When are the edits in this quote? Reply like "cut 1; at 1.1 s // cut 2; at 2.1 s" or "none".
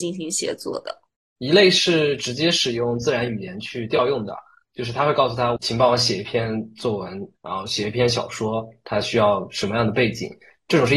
cut 1; at 7.3 s